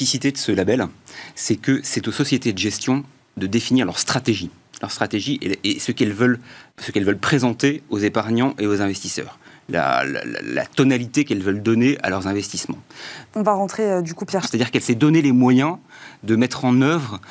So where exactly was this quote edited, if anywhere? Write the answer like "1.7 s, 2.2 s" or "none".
6.7 s, 13.3 s, 14.4 s